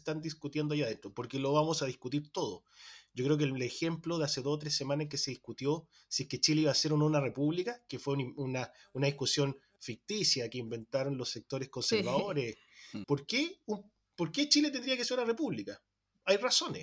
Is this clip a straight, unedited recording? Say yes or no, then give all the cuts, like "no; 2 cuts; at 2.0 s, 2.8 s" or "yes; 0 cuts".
no; 1 cut; at 13.0 s